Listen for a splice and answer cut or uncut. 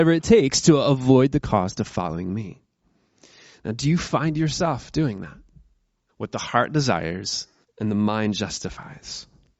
cut